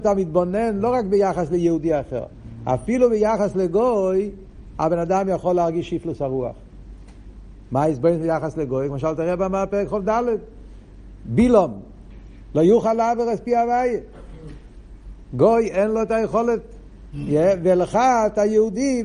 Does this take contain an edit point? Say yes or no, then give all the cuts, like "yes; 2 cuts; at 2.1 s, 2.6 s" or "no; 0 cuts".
no; 0 cuts